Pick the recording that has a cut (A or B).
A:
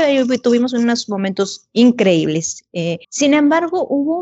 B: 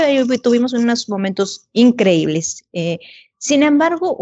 A